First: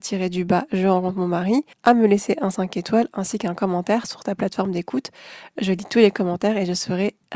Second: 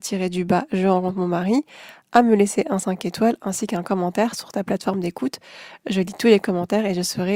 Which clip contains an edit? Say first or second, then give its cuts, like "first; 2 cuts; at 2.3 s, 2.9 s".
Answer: first; 1 cut; at 1.7 s